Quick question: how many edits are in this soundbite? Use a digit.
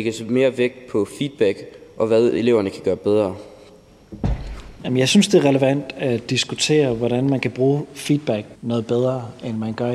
2